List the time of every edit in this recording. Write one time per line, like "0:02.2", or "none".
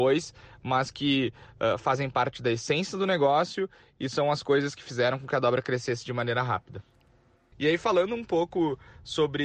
0:07.5